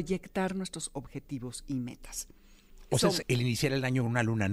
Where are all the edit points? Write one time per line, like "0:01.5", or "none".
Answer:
0:03.2